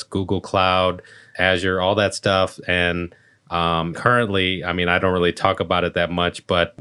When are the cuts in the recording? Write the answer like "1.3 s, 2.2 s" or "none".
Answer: 3.9 s